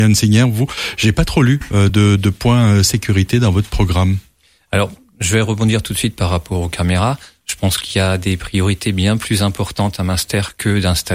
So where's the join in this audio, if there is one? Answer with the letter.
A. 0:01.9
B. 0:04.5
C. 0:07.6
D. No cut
D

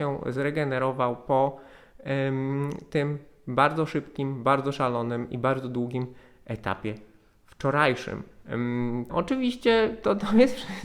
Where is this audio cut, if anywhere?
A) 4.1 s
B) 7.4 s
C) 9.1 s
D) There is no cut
C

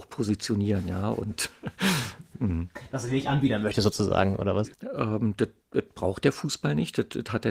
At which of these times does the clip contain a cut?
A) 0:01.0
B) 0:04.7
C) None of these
B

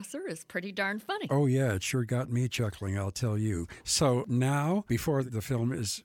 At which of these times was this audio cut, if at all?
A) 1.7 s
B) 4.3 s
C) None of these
C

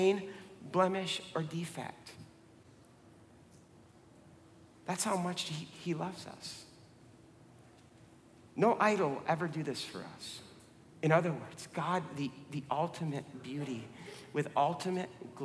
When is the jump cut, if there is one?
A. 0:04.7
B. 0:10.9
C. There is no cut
B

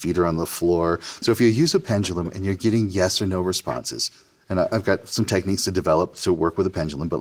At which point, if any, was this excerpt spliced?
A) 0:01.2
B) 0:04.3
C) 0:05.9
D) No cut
A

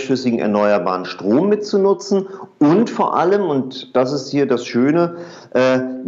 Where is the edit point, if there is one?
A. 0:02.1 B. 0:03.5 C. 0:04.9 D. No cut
D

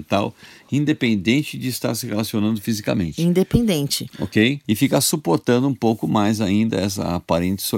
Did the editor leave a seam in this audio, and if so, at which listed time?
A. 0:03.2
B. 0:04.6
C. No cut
B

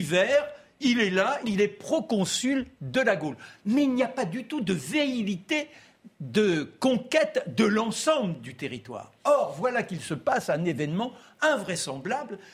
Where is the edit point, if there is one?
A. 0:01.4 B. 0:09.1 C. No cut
A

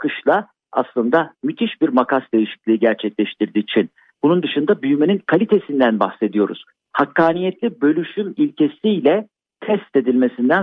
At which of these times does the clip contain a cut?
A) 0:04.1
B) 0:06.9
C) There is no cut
B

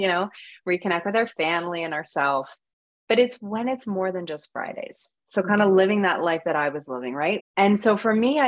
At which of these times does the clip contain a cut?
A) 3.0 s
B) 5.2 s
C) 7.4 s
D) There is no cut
C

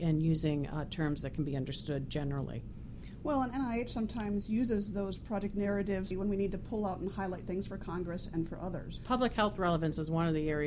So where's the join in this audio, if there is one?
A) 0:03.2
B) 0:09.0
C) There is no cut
B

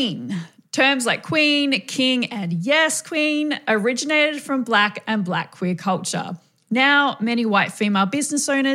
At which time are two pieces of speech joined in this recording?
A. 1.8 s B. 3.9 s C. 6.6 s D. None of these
D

